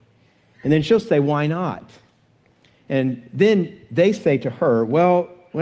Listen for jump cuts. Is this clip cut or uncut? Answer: uncut